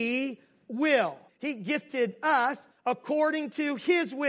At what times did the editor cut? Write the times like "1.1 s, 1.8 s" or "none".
1.3 s, 2.7 s